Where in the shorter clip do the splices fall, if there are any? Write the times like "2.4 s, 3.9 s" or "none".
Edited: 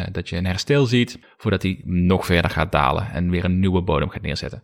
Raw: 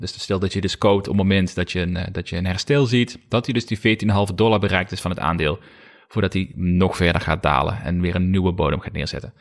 1.2 s